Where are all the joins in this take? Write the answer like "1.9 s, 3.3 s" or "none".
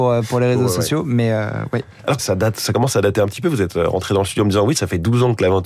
2.2 s